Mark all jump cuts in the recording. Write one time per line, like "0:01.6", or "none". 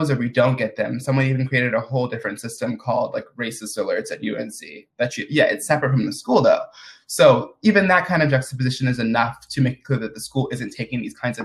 none